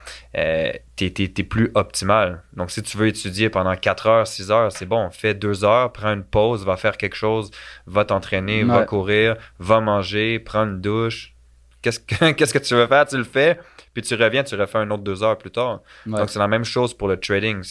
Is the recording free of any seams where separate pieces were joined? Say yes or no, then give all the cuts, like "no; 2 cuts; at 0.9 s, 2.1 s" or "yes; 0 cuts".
yes; 0 cuts